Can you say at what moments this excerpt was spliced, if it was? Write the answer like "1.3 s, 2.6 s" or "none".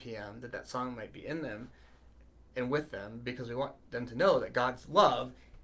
none